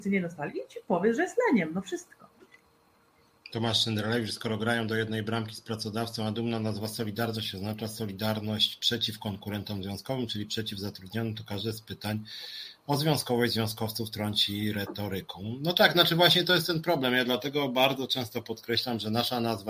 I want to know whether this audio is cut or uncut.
uncut